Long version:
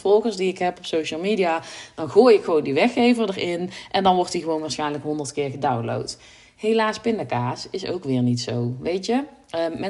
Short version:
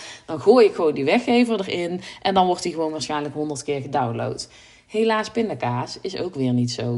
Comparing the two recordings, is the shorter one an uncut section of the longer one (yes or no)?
yes